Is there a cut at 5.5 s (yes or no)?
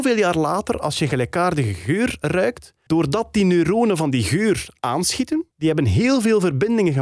yes